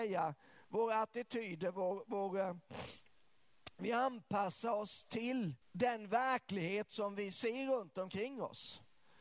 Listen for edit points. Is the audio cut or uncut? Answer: cut